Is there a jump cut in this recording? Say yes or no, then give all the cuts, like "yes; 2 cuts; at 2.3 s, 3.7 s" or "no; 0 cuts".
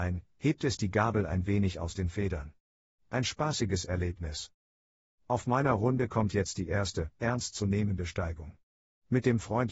yes; 1 cut; at 7.2 s